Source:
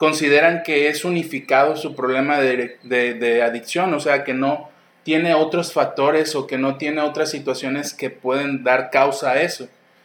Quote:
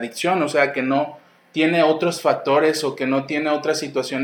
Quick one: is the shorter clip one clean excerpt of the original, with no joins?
yes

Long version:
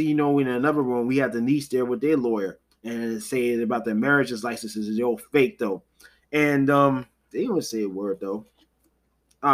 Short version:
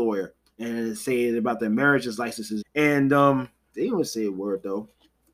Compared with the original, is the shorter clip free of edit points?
no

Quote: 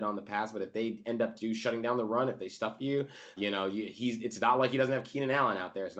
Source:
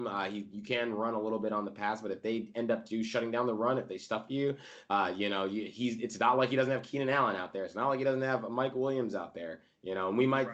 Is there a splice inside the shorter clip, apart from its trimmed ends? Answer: yes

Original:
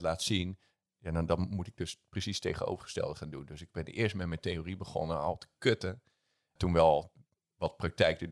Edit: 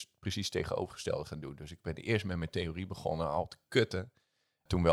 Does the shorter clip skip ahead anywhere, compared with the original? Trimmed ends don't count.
no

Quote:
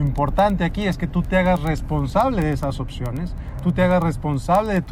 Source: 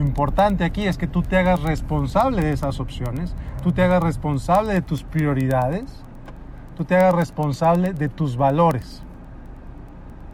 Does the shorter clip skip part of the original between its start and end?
no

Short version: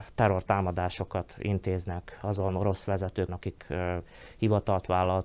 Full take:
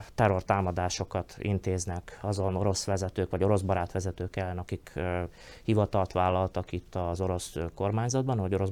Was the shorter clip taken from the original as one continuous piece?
no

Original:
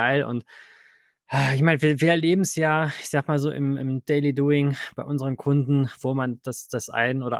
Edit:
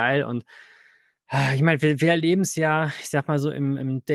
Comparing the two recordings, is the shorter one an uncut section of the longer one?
yes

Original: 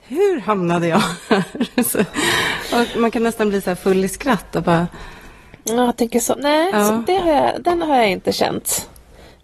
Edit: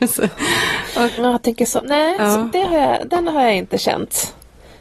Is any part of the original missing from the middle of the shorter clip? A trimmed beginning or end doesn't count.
yes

